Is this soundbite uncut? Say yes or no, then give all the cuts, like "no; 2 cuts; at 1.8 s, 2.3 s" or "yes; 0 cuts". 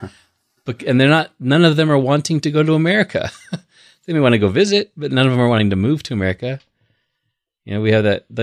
yes; 0 cuts